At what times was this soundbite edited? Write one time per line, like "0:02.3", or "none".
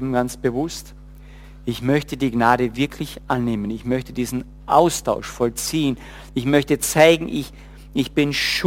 none